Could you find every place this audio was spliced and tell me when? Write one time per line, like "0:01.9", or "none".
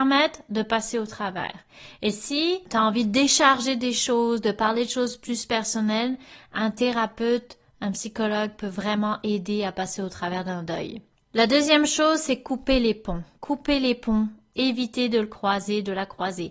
0:14.5

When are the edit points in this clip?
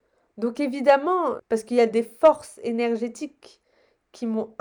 0:01.4

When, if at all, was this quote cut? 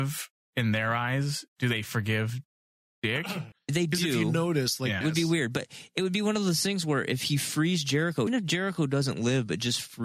0:03.5
0:05.0
0:08.3

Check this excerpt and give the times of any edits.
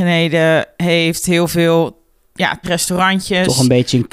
0:02.6

